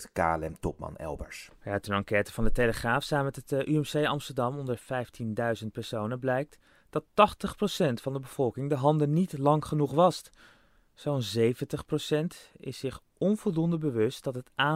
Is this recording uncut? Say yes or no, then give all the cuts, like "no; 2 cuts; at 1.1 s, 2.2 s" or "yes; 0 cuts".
yes; 0 cuts